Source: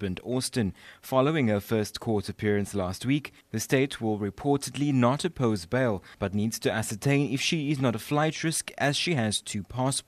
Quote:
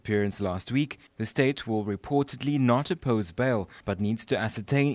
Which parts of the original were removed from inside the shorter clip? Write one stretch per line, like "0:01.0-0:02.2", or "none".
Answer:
none